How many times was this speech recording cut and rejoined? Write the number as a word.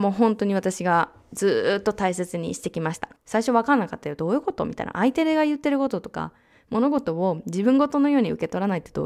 one